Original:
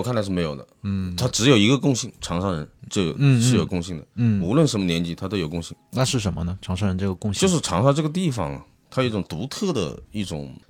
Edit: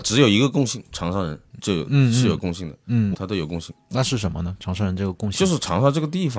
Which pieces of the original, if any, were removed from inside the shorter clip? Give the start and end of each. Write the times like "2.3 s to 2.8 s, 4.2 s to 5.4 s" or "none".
4.4 s to 5.2 s